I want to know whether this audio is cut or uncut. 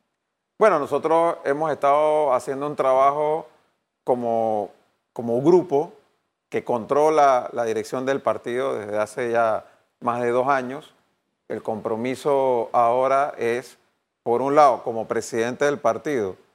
uncut